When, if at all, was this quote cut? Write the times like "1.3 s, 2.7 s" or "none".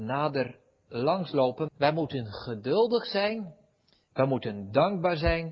1.7 s